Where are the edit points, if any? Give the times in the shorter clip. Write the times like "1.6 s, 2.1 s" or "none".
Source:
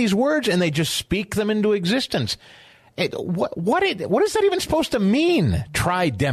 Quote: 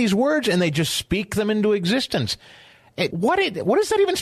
3.1 s